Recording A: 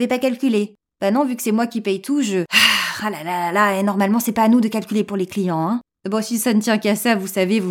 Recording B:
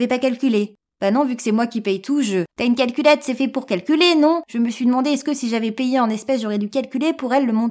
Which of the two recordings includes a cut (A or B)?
B